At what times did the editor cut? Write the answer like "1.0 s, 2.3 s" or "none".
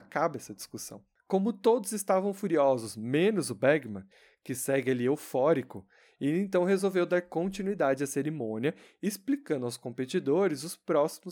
none